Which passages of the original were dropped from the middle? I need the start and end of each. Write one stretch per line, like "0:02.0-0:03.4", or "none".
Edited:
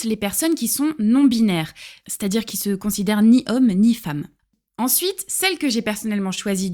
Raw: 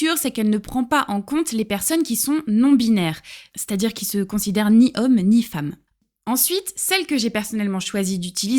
none